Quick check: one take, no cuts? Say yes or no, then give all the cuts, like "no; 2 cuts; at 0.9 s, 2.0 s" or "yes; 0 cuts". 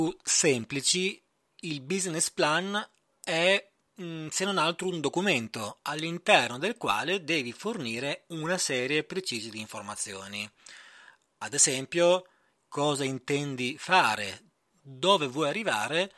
no; 2 cuts; at 12.6 s, 14.7 s